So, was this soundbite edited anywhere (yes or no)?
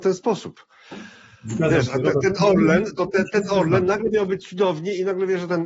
no